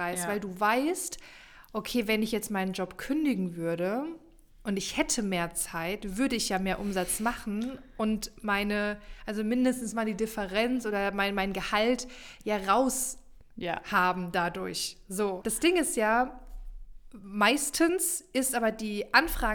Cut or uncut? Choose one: cut